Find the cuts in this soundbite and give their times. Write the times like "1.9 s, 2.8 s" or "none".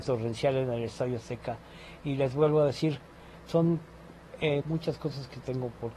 4.6 s